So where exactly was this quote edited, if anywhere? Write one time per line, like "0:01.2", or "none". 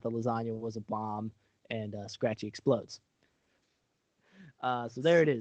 0:03.6

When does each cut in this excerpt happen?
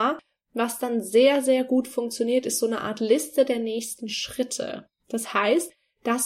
none

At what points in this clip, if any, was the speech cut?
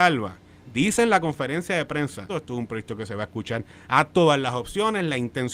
0:02.3

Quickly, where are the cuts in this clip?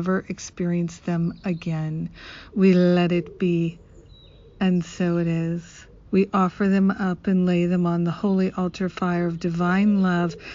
0:02.5
0:06.1

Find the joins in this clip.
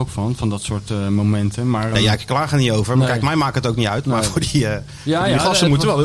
0:01.9

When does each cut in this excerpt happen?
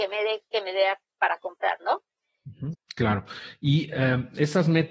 0:02.7

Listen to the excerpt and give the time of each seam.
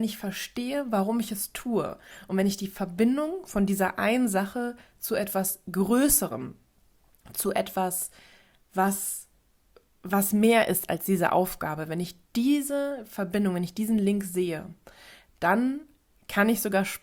none

